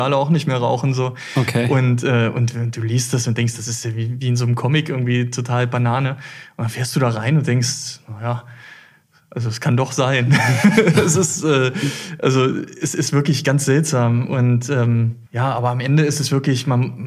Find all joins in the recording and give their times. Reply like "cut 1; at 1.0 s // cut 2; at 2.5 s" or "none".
cut 1; at 15.3 s

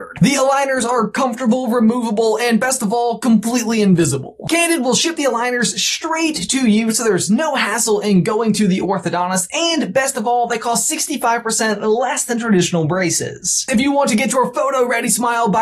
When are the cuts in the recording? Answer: none

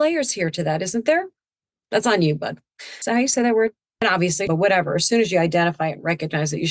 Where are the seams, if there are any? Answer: cut 1; at 1.8 s // cut 2; at 4.5 s

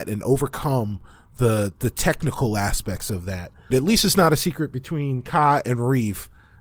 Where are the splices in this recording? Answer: cut 1; at 3.7 s

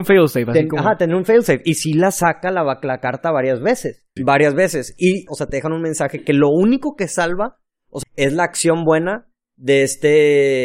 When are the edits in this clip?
cut 1; at 4.2 s // cut 2; at 5.3 s // cut 3; at 8.0 s

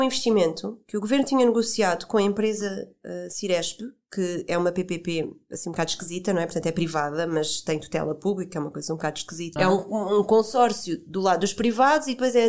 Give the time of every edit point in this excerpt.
cut 1; at 9.6 s

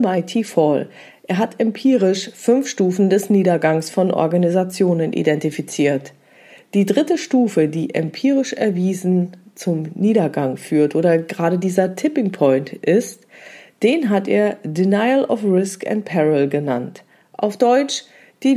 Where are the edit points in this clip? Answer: none

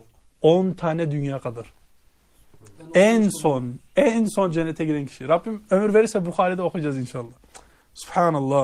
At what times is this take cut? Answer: none

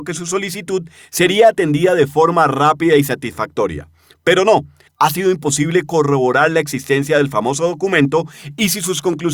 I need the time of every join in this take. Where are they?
cut 1; at 4.9 s

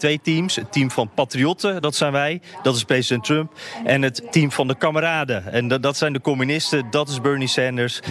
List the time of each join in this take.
none

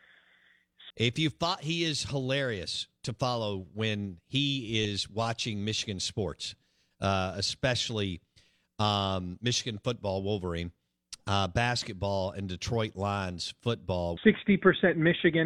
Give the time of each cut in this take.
cut 1; at 0.9 s // cut 2; at 14.2 s

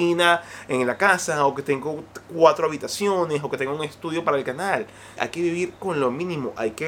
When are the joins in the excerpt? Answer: cut 1; at 5.2 s

